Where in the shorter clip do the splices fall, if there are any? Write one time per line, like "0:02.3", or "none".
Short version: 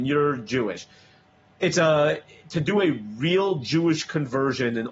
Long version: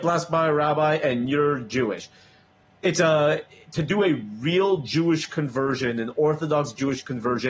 none